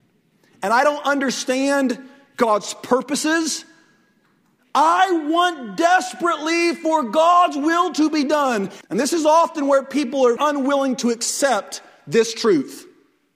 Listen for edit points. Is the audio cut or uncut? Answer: cut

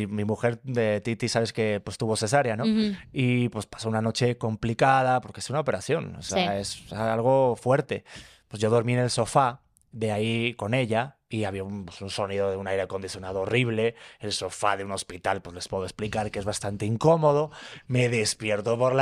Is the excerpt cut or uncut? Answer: uncut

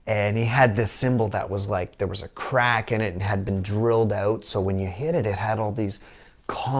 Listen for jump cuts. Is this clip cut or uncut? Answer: uncut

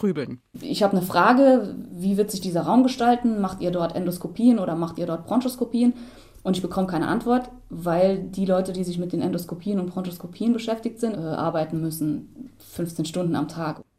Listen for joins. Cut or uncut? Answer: cut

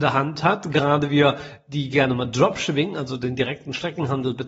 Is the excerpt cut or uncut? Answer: uncut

